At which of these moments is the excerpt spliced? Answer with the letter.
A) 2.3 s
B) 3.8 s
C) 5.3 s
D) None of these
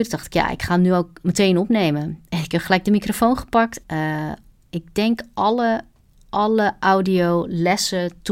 B